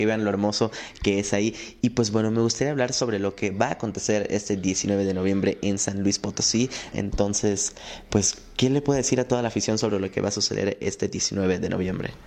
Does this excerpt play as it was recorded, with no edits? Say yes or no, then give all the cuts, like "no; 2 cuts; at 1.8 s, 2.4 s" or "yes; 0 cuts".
no; 1 cut; at 6.9 s